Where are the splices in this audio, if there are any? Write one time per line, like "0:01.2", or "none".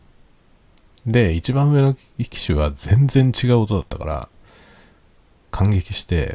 none